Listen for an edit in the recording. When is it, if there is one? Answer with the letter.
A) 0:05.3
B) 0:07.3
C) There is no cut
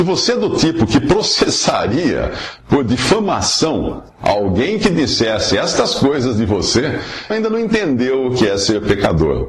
B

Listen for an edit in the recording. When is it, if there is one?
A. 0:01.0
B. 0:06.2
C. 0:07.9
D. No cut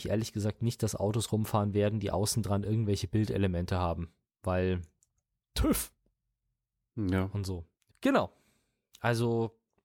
C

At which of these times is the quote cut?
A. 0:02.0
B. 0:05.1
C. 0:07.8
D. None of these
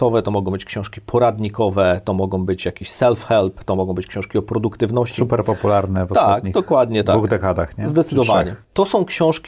D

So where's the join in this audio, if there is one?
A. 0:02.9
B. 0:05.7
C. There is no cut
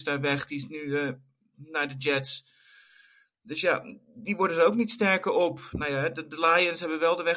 C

